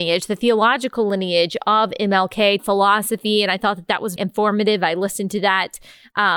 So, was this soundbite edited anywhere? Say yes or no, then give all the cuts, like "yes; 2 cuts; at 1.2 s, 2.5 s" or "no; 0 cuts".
yes; 2 cuts; at 2.6 s, 4.2 s